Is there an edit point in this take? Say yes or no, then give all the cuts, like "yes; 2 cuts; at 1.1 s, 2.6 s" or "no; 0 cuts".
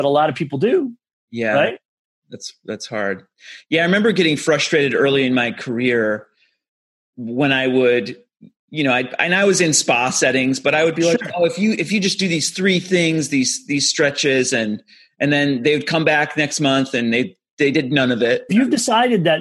yes; 1 cut; at 18.5 s